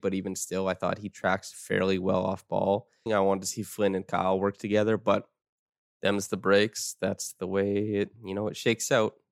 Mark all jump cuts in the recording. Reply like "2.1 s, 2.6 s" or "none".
3.1 s